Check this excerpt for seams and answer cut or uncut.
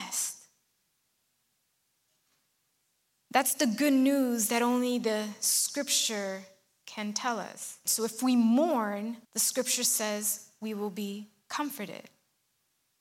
cut